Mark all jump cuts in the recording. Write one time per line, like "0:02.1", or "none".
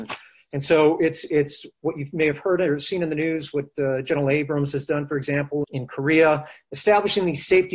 0:05.6